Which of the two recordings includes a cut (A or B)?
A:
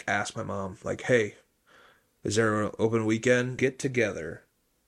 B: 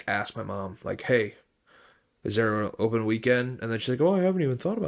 A